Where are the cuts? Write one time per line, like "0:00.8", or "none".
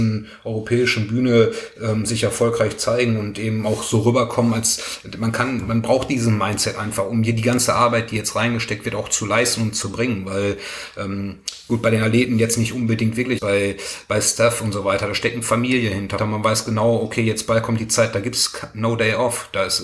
0:13.4
0:16.2